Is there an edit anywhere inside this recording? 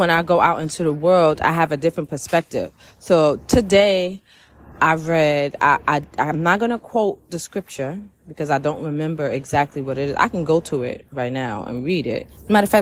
no; 0 cuts

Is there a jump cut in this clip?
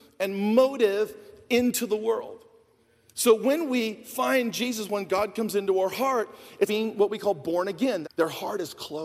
yes; 2 cuts; at 6.7 s, 8.0 s

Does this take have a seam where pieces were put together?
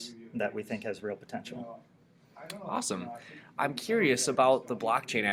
no; 0 cuts

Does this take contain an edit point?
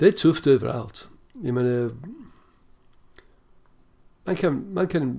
no; 0 cuts

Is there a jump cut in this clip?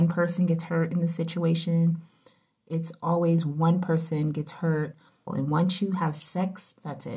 yes; 1 cut; at 5.3 s

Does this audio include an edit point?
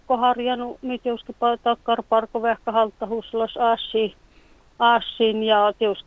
no; 0 cuts

